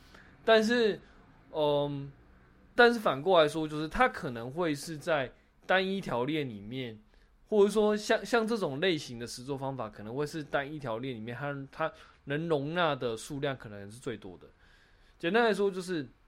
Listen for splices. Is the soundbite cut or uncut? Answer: cut